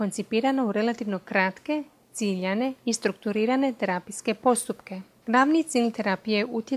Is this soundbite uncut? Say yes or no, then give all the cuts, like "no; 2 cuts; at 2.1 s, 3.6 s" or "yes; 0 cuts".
no; 1 cut; at 5.2 s